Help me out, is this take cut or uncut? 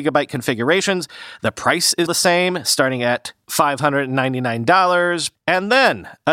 cut